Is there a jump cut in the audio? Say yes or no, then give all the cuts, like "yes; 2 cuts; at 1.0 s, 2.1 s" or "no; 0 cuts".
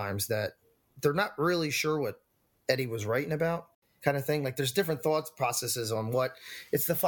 yes; 1 cut; at 4.0 s